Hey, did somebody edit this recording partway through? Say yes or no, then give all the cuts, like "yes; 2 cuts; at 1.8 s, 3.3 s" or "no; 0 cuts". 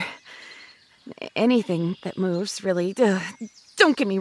no; 0 cuts